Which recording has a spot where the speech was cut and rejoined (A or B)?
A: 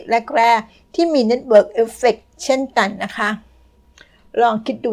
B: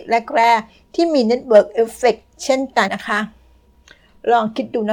B